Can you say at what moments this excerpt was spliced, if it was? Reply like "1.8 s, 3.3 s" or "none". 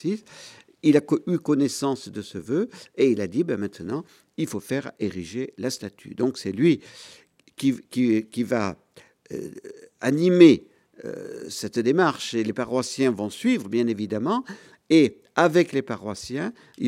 none

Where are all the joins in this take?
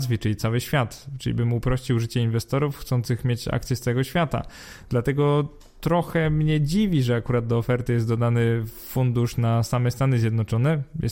none

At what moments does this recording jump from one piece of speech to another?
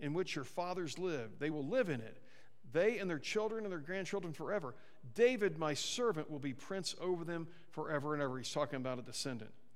none

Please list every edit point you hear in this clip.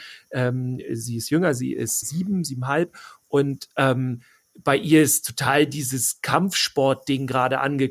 2.0 s

